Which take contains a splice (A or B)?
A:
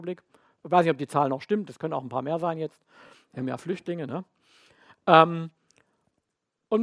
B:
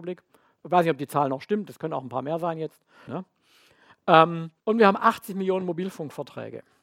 B